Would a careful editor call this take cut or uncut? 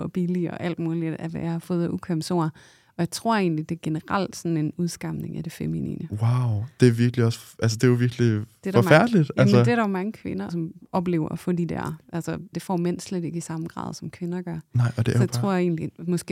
cut